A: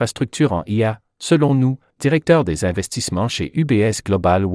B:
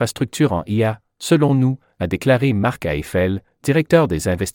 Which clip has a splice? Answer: A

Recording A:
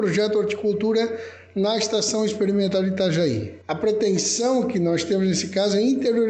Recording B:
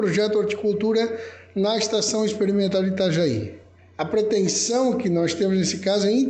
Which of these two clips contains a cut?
A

